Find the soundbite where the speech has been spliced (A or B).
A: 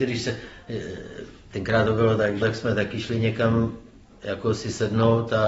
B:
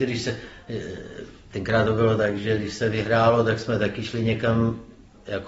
A